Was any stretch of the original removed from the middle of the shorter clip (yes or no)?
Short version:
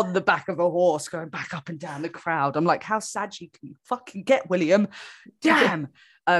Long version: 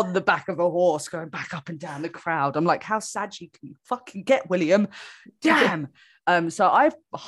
no